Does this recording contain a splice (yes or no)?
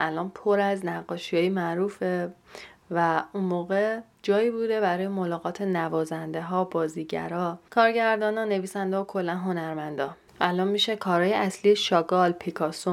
no